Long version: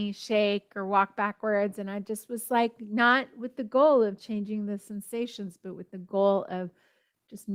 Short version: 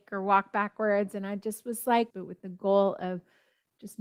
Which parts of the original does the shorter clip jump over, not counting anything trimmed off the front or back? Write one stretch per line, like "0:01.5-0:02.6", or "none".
0:02.7-0:05.6